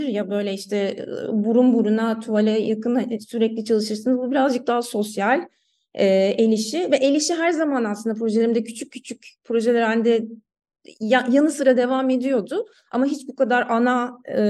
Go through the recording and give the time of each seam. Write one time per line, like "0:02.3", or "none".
none